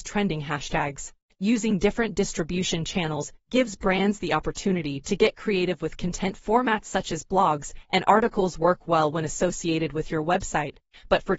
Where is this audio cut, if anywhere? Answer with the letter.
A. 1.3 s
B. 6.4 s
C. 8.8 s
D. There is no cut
B